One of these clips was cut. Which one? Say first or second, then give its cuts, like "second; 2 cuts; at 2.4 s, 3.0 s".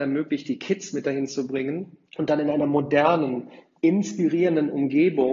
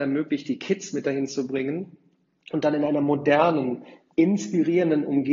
first; 1 cut; at 2.1 s